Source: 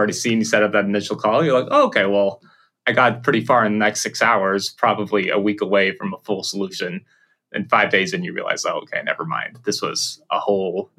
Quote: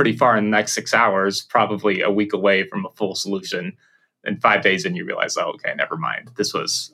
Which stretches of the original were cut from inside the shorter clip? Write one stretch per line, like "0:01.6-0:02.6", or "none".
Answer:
none